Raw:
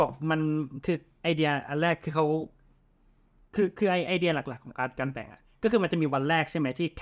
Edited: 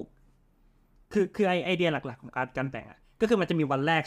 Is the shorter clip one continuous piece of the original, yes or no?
yes